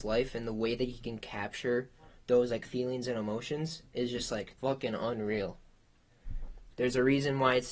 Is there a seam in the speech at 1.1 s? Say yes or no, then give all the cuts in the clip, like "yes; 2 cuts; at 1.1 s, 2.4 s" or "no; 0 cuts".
no; 2 cuts; at 4.6 s, 6.7 s